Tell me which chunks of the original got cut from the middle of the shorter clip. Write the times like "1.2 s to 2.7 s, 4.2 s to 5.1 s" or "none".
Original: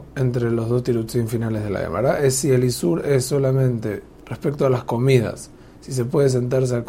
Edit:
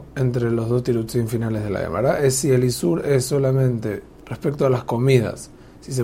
none